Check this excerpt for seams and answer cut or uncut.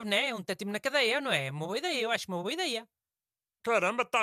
uncut